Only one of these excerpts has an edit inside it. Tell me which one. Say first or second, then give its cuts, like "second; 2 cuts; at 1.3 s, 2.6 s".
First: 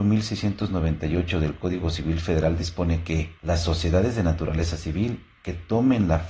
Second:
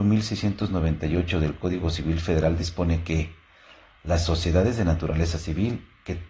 first; 1 cut; at 3.4 s